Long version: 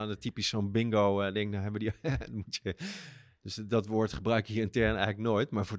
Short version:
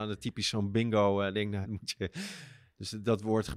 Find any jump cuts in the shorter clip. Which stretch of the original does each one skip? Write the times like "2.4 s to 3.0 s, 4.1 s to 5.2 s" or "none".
1.6 s to 2.3 s